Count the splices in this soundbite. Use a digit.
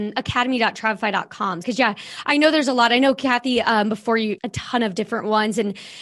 2